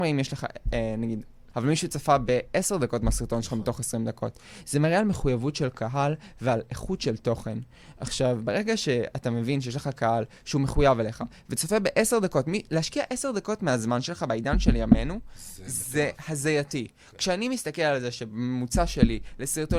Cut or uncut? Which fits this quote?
cut